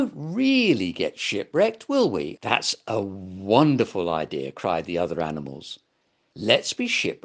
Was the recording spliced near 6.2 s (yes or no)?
no